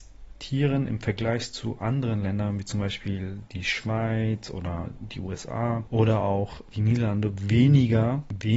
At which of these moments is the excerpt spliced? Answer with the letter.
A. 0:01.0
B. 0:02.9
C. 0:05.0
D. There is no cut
D